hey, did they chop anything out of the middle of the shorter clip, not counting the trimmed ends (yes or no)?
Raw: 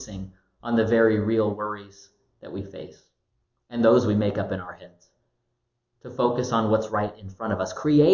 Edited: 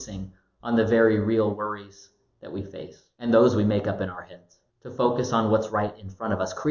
yes